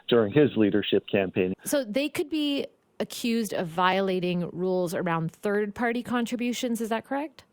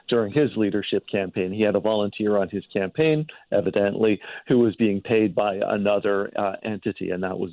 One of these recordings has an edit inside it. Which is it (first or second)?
first